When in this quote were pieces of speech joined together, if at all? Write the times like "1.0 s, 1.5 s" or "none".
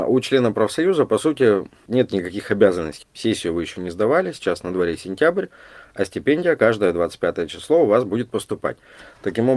3.0 s